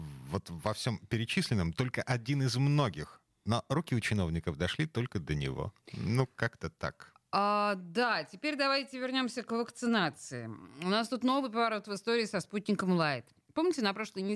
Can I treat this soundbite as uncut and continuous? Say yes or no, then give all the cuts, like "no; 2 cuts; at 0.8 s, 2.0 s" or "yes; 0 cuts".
no; 1 cut; at 5.8 s